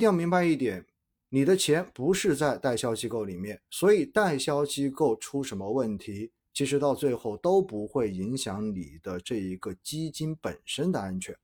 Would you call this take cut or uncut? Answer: uncut